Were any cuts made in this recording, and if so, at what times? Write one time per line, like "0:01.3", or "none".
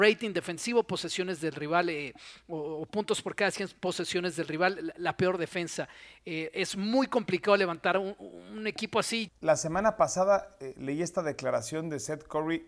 0:09.3

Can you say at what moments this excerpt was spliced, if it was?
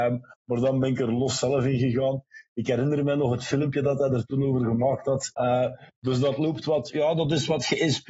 0:05.3

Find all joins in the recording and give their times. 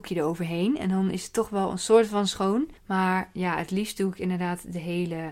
0:02.8

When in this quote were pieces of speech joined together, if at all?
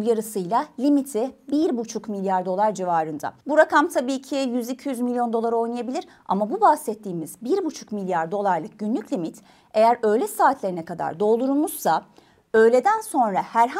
0:03.4

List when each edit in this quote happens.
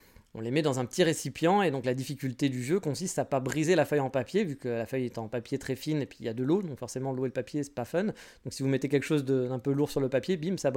none

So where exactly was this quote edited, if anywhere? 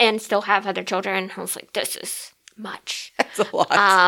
none

